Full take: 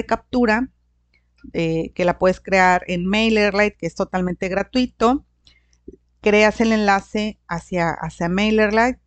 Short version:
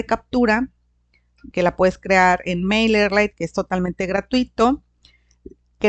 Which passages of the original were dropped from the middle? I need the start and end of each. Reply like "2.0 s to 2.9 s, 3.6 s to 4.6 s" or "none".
1.5 s to 1.9 s